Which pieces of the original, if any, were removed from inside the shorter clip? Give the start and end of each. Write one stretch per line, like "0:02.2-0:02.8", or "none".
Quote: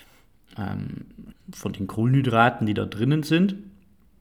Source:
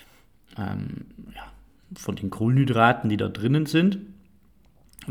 0:01.3-0:01.7